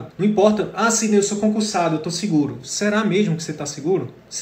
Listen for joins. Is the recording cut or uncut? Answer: uncut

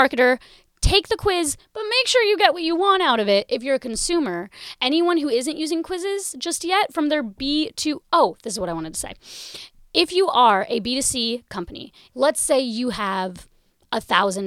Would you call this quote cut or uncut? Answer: cut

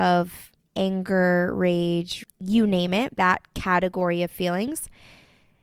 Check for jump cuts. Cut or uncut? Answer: cut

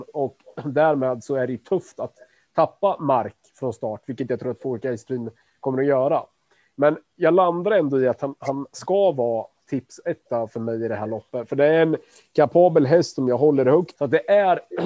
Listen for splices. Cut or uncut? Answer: cut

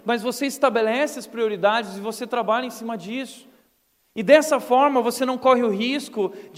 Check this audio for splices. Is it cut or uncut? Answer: uncut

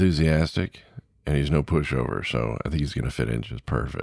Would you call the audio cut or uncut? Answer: uncut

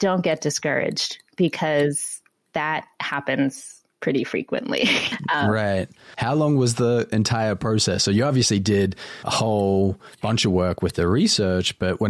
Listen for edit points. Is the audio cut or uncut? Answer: uncut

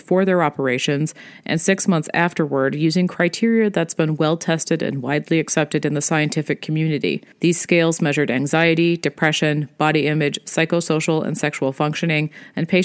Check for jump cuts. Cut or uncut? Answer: uncut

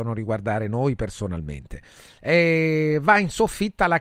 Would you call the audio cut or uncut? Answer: uncut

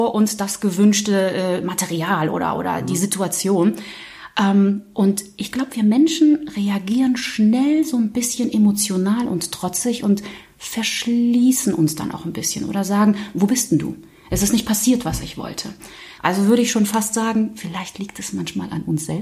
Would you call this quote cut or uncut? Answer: cut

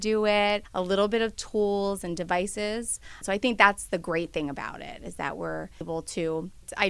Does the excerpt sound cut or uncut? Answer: cut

